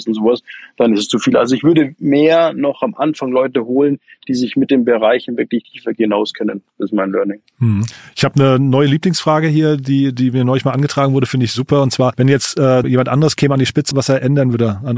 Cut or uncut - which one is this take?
cut